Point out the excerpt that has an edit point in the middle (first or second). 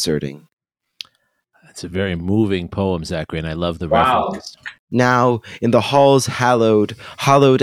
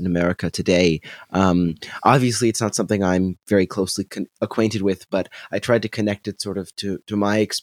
first